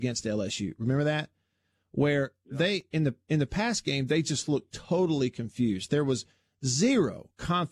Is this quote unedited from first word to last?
yes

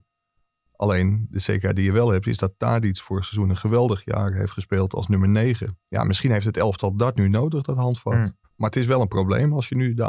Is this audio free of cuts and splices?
no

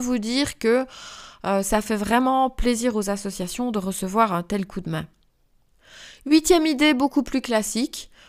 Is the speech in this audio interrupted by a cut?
no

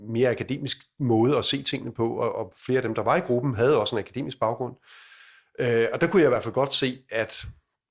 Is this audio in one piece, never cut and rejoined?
yes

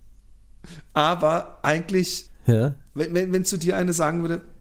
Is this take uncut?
no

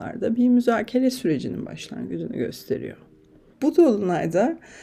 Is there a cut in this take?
yes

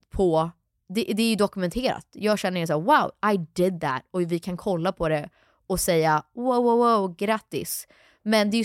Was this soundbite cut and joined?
no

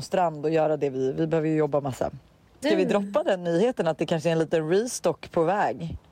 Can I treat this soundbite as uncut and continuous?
no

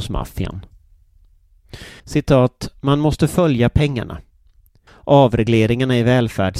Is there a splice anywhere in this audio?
yes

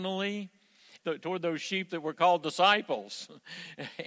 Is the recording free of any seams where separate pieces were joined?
no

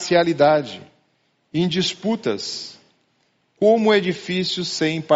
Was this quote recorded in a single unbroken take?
yes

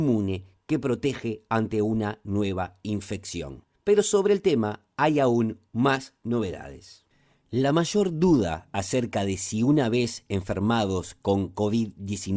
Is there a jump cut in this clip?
no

